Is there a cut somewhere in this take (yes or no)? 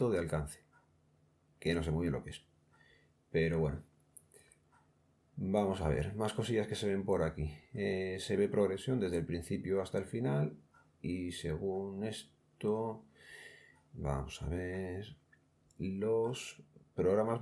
no